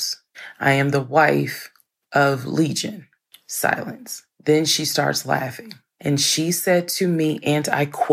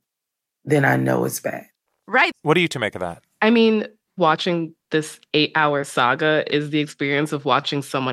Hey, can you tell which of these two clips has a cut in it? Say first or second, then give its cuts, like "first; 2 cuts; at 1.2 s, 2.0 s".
second; 1 cut; at 2.3 s